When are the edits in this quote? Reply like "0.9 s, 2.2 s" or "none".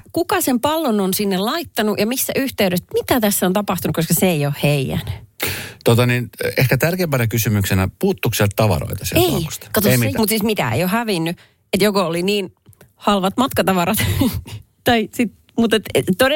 10.2 s